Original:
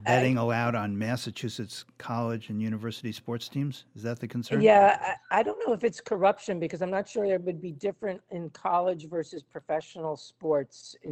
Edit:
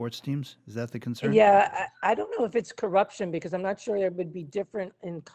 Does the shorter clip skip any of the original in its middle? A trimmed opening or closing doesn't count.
no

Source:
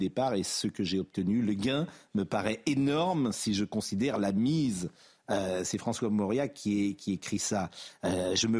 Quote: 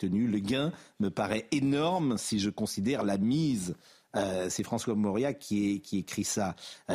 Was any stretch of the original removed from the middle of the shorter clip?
no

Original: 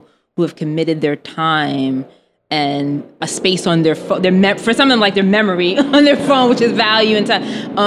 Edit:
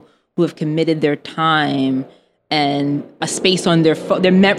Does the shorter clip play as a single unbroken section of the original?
yes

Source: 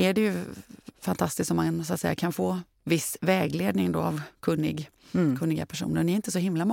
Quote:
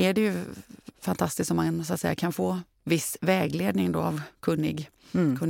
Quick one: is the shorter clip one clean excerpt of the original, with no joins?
yes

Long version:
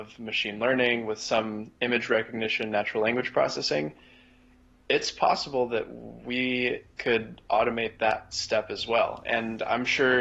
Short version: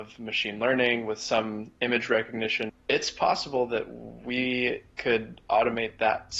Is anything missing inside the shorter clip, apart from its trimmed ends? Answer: yes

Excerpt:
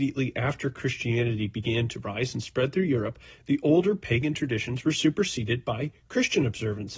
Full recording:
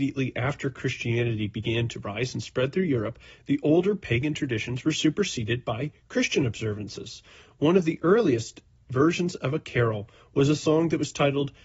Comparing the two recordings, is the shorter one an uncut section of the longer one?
yes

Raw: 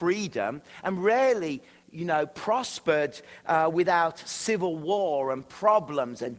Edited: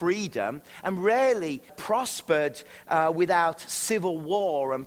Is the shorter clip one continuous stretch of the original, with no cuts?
no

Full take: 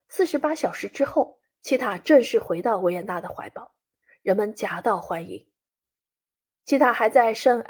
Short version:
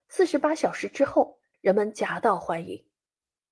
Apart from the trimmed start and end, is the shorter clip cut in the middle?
yes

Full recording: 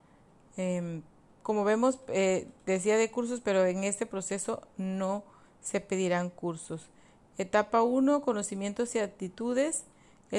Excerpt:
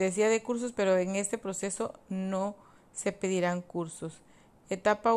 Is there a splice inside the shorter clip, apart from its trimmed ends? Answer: no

